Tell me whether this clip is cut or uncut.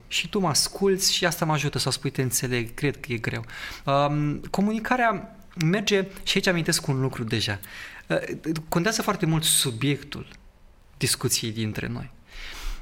cut